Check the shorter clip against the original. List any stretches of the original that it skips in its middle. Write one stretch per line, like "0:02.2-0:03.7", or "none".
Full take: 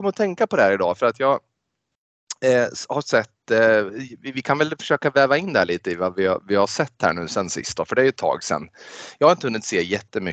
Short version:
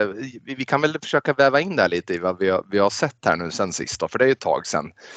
none